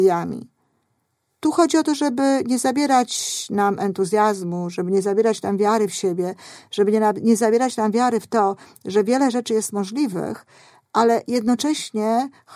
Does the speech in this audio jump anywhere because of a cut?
no; 0 cuts

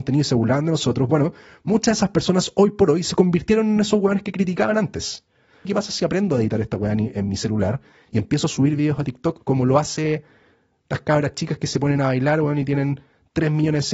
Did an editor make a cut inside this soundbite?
yes; 1 cut; at 5.7 s

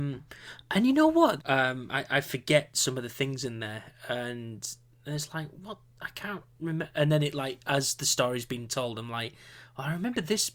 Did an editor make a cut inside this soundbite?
yes; 1 cut; at 1.4 s

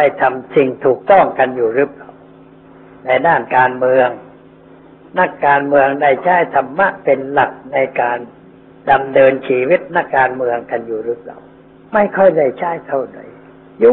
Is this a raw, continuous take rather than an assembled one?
no; 1 cut; at 10.1 s

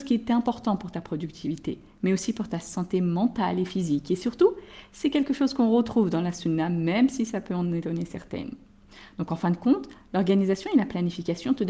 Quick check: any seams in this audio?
no; 0 cuts

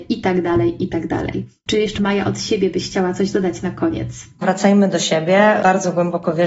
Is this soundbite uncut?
no; 1 cut; at 4.4 s

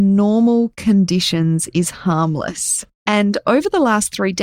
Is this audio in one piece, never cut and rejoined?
no; 1 cut; at 3.0 s

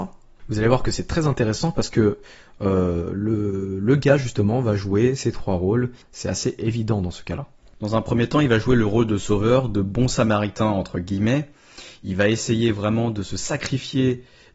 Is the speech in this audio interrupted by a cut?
no; 0 cuts

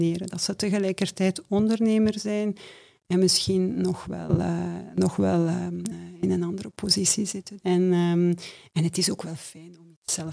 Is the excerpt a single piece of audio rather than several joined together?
no; 2 cuts; at 5.9 s, 7.6 s

